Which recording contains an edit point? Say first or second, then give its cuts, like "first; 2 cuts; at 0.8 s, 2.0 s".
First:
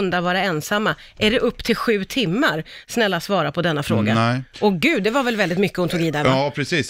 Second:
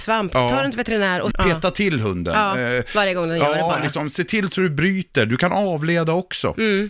second; 1 cut; at 1.3 s